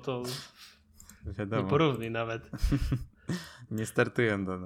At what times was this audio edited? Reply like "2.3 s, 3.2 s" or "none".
3.7 s